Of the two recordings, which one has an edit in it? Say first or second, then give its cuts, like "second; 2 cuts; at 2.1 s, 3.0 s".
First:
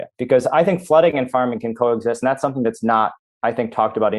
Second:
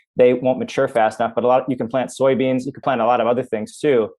second; 1 cut; at 2.8 s